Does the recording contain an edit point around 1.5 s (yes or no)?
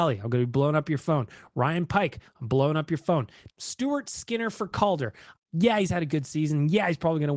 no